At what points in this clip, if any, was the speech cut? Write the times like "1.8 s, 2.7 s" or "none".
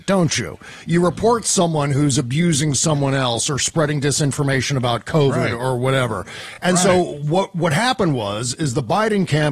none

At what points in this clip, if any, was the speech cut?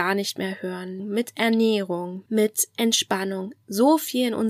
1.0 s, 2.3 s

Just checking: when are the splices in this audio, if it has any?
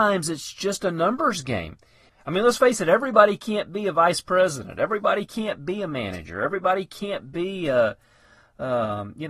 2.1 s

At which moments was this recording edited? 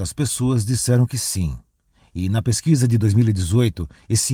none

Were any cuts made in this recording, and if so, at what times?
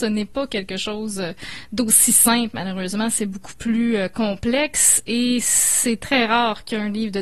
none

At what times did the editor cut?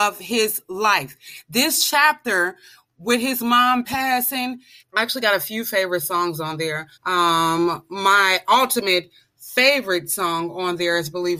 4.8 s, 6.9 s

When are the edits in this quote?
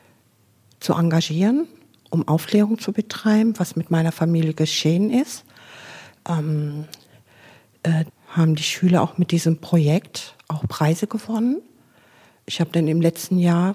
8.1 s

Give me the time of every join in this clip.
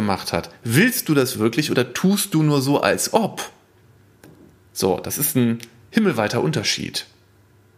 none

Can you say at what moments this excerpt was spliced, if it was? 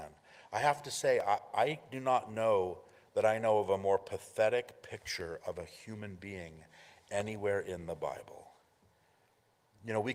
none

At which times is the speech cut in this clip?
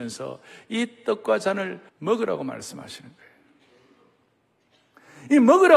1.9 s

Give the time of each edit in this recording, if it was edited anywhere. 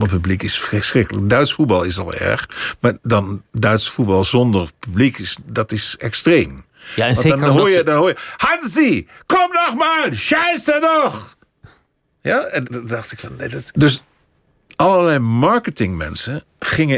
12.6 s, 13.7 s

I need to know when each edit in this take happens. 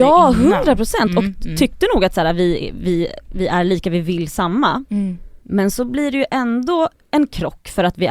5.4 s

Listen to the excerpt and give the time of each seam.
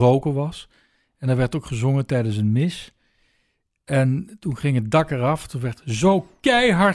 none

